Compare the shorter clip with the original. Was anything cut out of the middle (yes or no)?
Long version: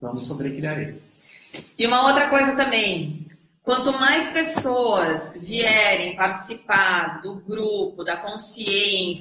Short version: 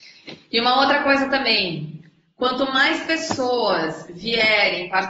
no